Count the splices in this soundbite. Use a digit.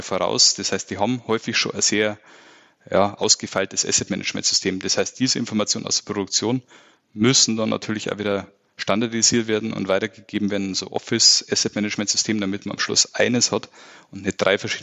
0